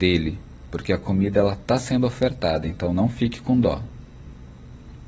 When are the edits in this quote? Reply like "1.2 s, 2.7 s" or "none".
none